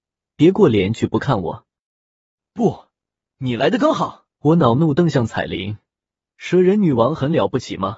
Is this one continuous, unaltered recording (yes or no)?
no